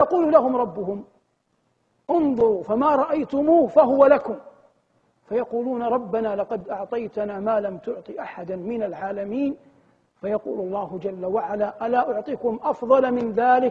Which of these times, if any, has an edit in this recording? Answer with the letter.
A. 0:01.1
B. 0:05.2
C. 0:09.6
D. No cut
D